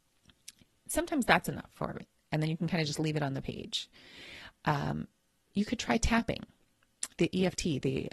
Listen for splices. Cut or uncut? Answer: cut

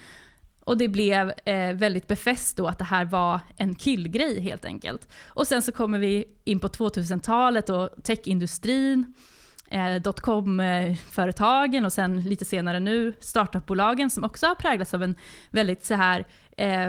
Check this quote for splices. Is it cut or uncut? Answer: uncut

